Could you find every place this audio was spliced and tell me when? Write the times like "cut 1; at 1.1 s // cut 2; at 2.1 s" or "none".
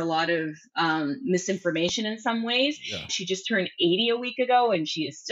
cut 1; at 3.1 s